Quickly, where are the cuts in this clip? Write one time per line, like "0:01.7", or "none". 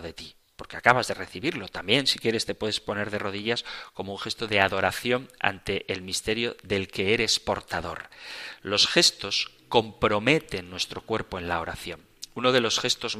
none